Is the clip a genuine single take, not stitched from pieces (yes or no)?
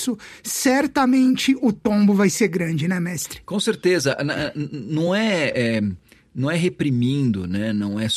yes